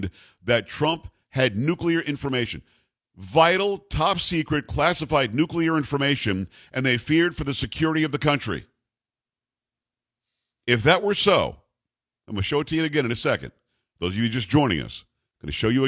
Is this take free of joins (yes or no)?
yes